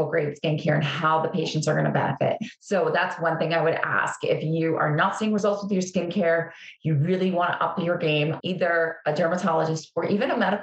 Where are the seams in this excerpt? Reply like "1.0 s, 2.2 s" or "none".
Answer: 8.4 s